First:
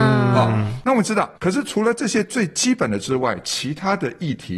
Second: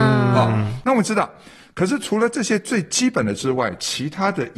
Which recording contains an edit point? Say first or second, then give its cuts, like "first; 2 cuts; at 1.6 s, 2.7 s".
first; 1 cut; at 1.4 s